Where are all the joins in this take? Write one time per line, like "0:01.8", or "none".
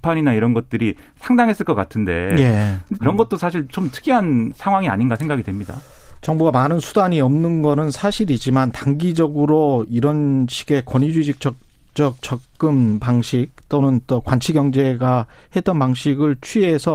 0:03.0

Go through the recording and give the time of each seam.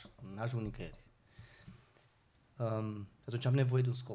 none

